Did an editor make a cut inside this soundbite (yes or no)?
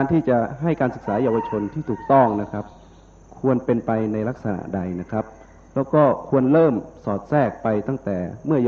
no